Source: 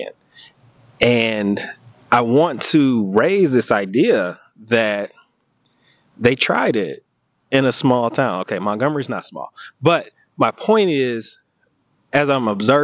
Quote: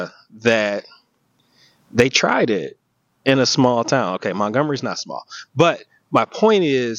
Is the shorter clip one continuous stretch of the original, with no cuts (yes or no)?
yes